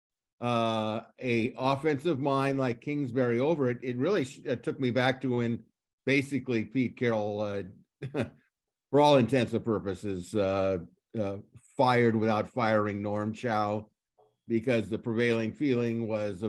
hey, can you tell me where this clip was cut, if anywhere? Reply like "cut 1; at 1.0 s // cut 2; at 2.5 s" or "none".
none